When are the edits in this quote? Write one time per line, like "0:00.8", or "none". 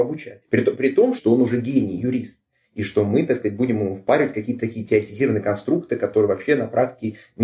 0:01.2